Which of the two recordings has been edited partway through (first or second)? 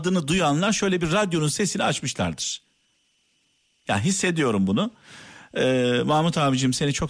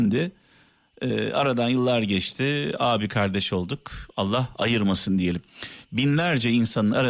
second